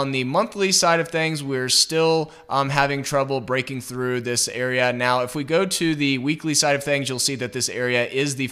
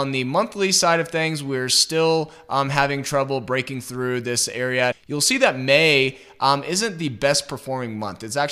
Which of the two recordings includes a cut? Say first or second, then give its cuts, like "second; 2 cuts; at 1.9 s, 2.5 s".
second; 1 cut; at 4.9 s